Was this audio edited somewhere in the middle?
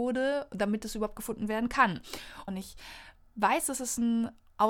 yes; 1 cut; at 2.5 s

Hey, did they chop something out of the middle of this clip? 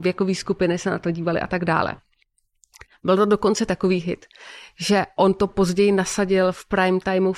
no; 0 cuts

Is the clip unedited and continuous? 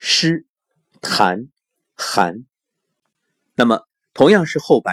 yes; 0 cuts

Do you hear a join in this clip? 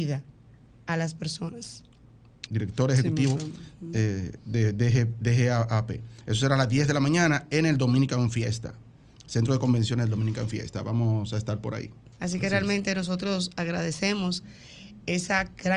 yes; 2 cuts; at 2.5 s, 12.1 s

